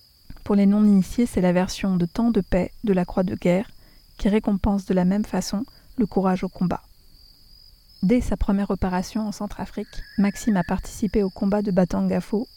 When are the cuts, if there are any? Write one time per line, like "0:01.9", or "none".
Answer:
0:07.9